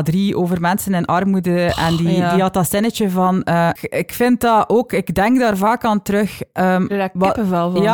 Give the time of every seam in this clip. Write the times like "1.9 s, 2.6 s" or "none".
3.8 s